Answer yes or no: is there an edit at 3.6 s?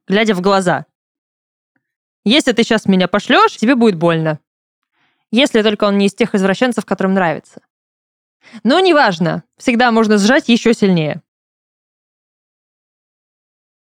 yes